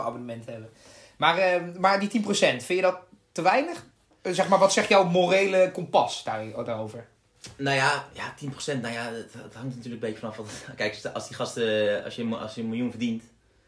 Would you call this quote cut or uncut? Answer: uncut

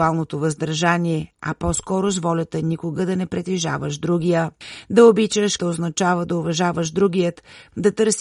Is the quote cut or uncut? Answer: cut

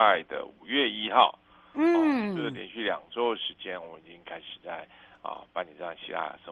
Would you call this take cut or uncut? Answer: uncut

